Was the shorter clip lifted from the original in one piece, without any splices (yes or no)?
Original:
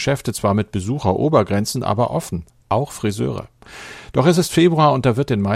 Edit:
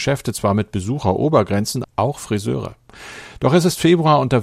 no